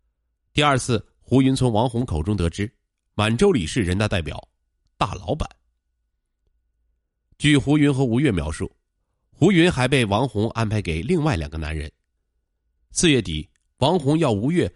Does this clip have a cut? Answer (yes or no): yes